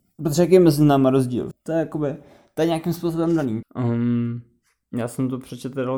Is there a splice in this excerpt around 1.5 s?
yes; 2 cuts; at 1.5 s, 3.6 s

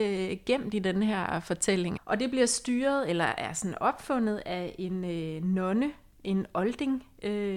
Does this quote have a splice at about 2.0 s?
yes; 1 cut; at 2.0 s

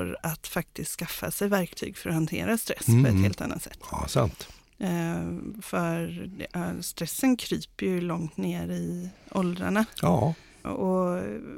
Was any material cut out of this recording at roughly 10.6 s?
yes; 1 cut; at 10.6 s

